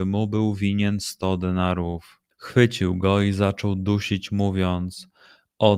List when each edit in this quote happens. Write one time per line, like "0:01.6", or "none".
0:02.3